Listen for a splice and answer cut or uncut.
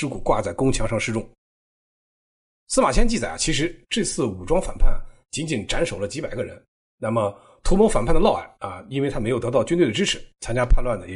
uncut